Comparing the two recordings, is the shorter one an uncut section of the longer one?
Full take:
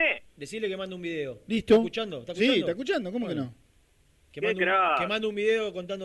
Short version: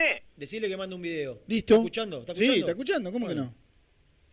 yes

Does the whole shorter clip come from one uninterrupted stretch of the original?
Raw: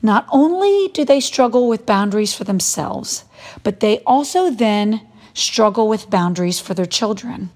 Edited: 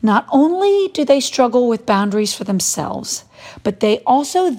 yes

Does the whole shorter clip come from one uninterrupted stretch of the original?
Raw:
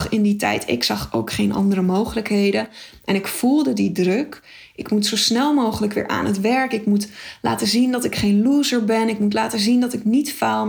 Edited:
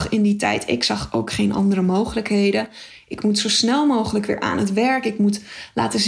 no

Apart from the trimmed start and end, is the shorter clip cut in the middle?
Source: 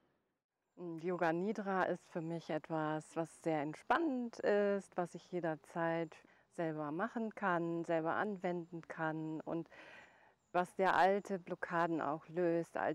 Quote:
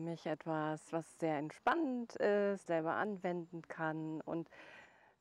yes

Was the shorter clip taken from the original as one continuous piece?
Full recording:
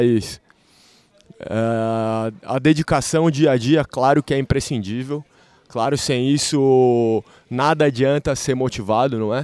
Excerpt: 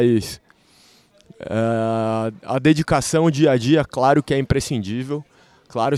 yes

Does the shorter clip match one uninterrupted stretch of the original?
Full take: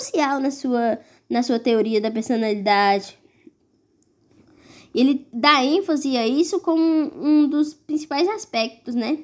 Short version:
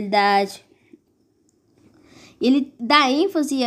yes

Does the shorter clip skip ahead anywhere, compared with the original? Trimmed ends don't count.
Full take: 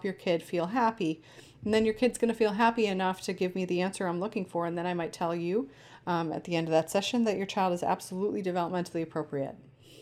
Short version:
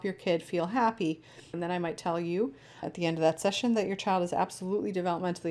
yes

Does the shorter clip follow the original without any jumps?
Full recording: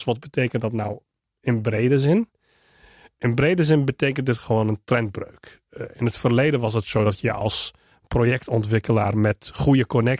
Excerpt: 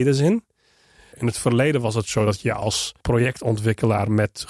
no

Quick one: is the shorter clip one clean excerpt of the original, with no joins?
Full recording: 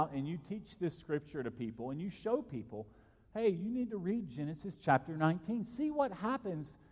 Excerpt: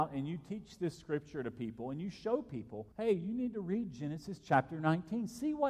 no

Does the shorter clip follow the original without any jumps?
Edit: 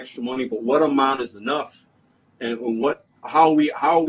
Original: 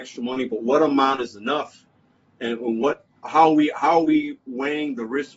yes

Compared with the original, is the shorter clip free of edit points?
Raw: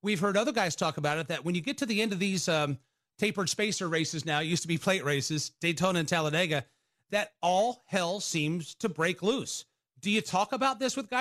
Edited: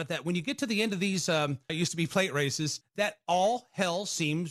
no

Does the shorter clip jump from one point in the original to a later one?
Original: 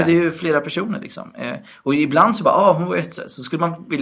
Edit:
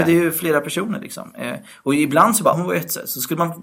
yes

